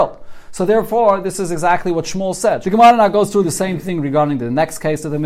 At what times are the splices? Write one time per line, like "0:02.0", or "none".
0:02.6

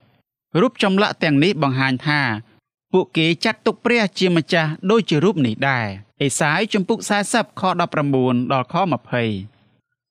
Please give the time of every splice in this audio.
0:06.1

